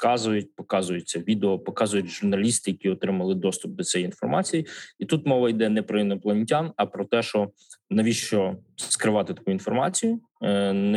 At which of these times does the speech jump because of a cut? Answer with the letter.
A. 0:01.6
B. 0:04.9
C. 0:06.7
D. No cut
D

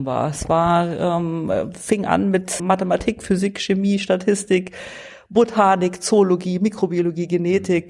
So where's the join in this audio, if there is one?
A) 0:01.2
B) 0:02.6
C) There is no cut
B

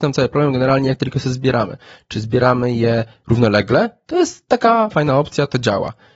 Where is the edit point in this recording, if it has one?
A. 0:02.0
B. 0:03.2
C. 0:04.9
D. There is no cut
C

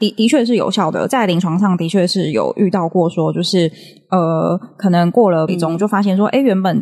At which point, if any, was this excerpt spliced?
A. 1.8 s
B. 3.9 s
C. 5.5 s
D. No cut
C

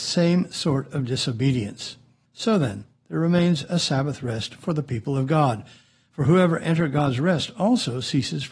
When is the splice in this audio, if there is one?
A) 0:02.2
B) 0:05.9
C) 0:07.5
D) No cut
A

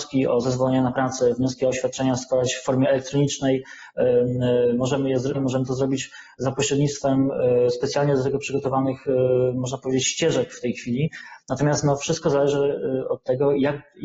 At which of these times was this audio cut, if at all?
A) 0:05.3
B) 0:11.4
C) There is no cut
A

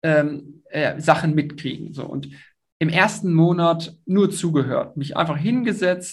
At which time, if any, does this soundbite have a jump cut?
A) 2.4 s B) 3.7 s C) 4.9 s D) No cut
D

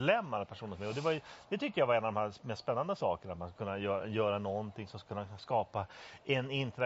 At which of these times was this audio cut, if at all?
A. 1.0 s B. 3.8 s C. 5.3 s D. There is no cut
D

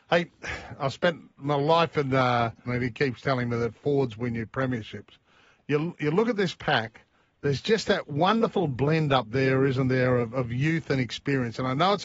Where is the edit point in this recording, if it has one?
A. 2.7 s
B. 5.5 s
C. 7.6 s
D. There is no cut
A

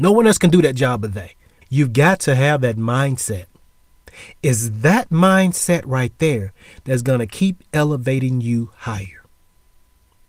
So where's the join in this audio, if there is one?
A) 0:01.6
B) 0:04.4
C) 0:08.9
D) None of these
A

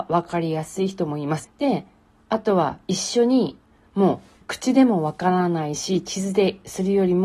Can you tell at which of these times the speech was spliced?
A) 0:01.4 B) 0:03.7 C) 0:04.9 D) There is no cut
A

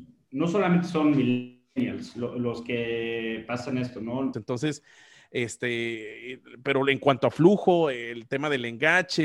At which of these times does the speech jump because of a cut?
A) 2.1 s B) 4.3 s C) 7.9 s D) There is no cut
B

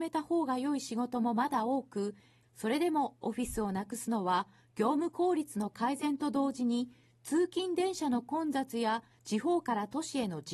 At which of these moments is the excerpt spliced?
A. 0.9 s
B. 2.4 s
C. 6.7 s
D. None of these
B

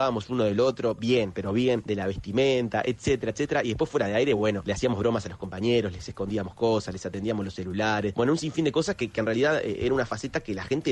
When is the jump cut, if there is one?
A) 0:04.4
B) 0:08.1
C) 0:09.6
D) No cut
D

